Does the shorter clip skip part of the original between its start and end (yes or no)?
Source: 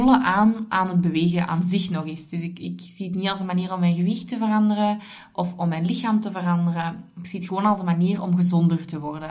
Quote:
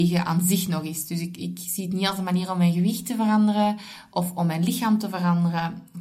no